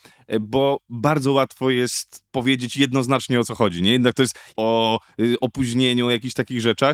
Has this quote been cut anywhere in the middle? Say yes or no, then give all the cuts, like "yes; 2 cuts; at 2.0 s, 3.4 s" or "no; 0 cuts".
yes; 2 cuts; at 2.3 s, 4.5 s